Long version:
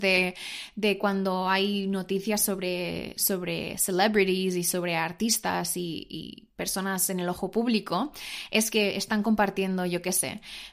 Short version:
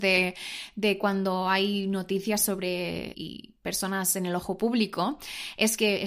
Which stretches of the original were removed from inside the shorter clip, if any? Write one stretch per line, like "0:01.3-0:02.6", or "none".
0:03.1-0:06.1